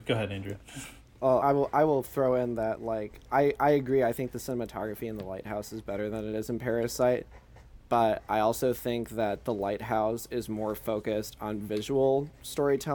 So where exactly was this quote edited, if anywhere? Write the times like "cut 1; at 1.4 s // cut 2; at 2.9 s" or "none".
cut 1; at 1.4 s